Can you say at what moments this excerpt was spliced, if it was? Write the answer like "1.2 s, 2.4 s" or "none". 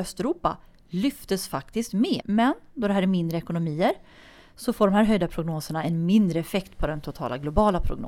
2.2 s